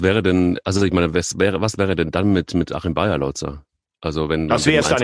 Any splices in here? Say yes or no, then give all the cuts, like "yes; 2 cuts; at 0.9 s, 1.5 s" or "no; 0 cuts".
no; 0 cuts